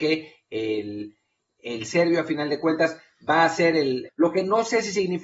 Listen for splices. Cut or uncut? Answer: cut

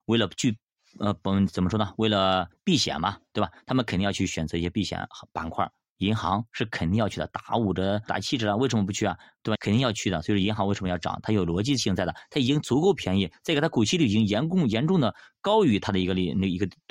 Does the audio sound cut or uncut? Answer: cut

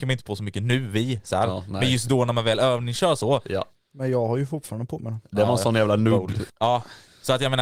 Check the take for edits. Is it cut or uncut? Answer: cut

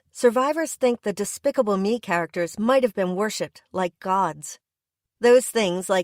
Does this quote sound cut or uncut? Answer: uncut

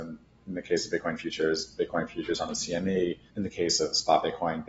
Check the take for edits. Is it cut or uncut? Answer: cut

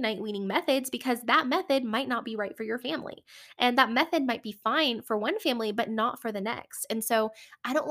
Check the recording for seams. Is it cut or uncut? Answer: uncut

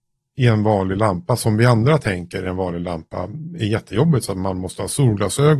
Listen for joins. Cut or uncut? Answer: uncut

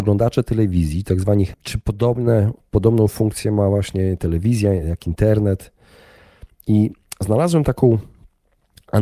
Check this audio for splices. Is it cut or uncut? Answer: cut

